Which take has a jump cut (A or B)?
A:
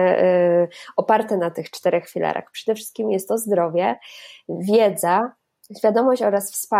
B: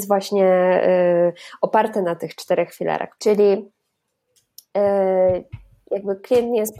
B